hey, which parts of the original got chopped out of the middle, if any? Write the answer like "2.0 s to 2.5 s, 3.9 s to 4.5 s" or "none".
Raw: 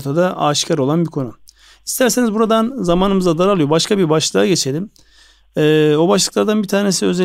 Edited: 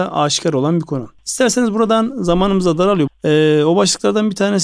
1.4 s to 1.8 s, 3.7 s to 5.4 s

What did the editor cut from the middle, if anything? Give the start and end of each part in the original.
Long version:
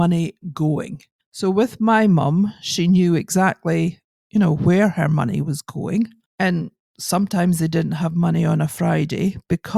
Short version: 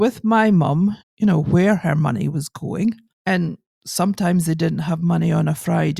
2.6 s to 4.1 s

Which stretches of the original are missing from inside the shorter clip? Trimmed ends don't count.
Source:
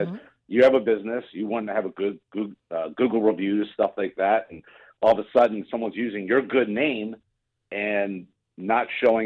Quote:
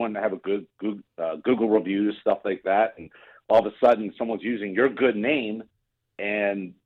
none

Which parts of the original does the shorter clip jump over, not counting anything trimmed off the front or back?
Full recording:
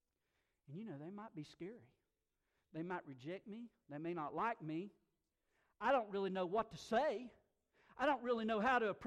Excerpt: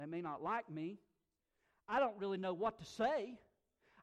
none

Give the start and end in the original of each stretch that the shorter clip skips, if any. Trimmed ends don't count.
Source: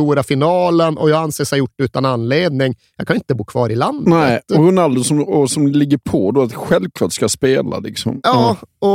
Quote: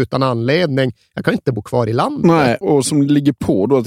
4.4 s to 5.3 s

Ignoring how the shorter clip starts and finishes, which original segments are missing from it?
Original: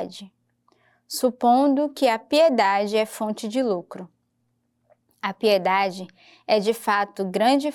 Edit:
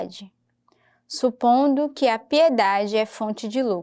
none

